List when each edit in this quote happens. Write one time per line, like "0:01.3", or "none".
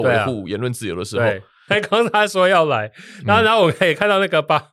0:01.7